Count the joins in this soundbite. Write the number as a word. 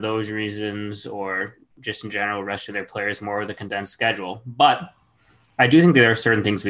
zero